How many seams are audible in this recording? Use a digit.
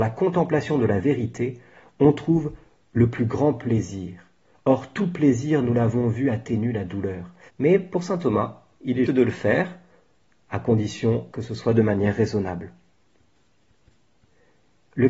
3